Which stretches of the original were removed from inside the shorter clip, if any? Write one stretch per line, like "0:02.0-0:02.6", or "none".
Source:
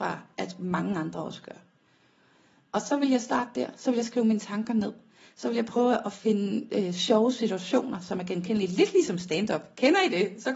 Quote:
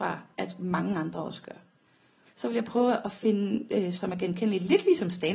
0:02.3-0:05.3
0:07.0-0:08.0

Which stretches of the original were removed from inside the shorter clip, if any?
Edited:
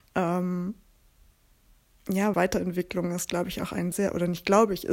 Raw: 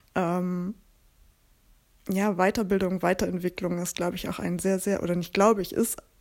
0:02.3-0:03.0
0:04.6-0:04.8

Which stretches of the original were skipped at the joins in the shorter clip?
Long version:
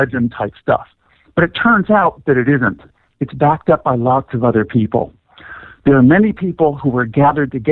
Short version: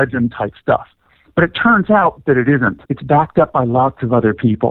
0:02.8-0:03.2

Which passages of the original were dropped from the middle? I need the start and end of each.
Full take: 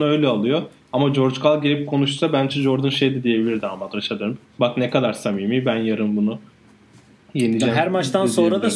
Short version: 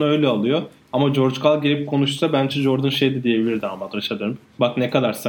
none

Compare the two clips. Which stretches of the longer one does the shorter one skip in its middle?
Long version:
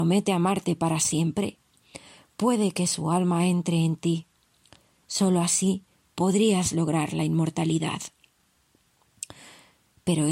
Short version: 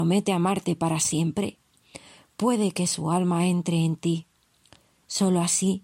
none

